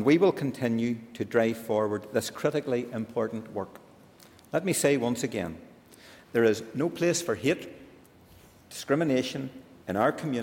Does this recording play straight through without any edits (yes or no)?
yes